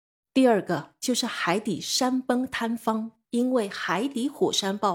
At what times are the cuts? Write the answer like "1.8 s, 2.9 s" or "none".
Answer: 3.3 s